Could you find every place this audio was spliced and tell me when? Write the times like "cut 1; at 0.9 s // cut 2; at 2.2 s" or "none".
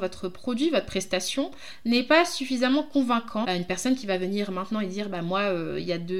cut 1; at 3.4 s